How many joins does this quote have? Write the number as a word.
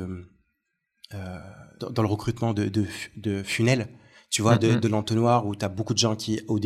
one